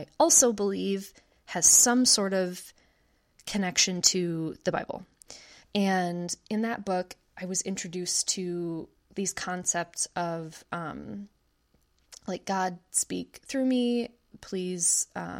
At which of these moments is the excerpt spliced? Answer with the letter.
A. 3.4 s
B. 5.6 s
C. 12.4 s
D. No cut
B